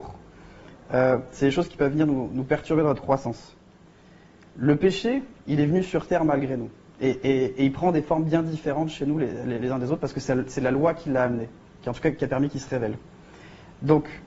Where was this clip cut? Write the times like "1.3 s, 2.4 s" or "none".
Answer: none